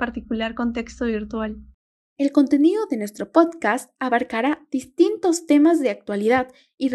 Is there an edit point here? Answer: no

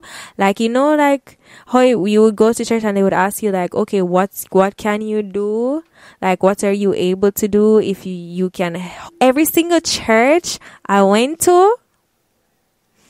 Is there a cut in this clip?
yes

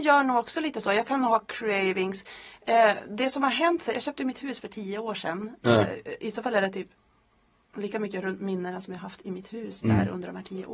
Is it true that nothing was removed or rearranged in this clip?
no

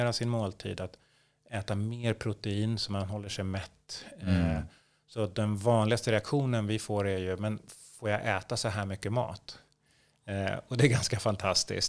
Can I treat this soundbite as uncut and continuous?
yes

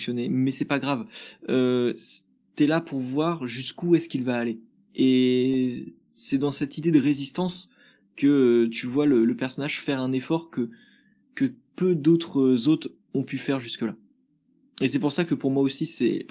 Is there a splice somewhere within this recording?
no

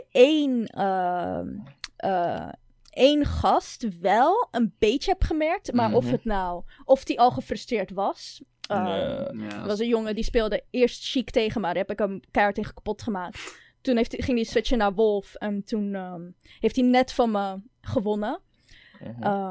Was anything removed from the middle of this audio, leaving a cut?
no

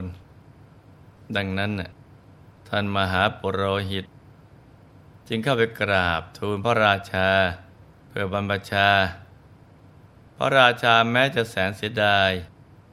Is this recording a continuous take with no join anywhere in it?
yes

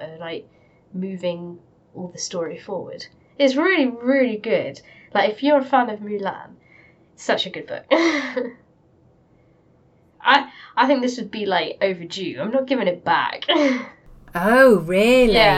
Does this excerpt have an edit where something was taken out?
no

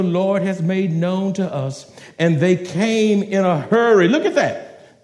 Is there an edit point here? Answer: no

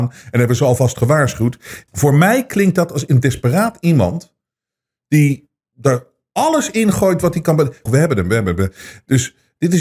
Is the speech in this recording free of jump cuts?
no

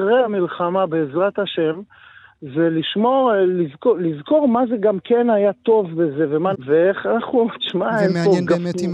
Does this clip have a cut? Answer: yes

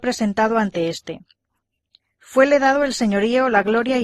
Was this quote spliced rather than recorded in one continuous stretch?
no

